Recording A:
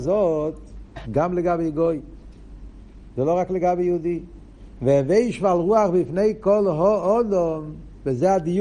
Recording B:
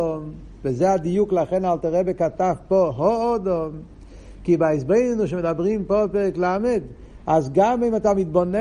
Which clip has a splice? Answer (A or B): A